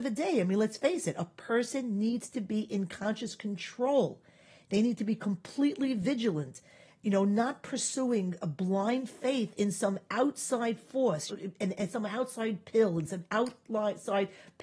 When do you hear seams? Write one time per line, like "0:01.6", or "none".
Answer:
0:11.3